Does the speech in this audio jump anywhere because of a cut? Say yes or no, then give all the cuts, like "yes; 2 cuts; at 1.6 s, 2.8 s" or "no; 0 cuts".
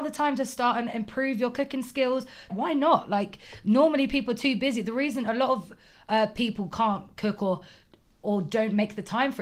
yes; 1 cut; at 2.5 s